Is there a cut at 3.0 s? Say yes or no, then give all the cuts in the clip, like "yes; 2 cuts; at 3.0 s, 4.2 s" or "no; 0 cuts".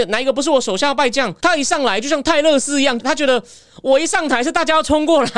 yes; 2 cuts; at 1.4 s, 3.0 s